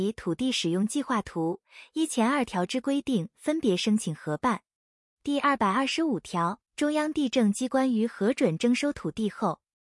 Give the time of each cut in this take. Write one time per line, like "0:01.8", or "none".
0:06.7